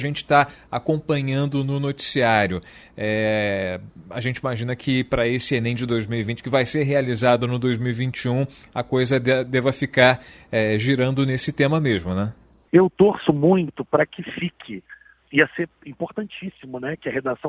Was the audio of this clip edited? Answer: yes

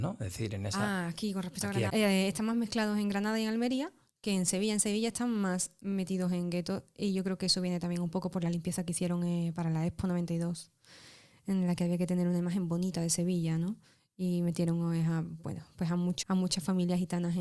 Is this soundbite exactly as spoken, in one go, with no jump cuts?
no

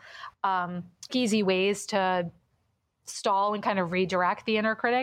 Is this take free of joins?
no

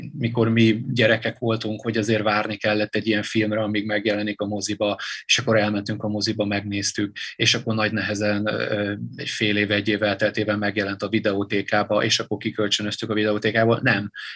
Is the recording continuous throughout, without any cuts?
yes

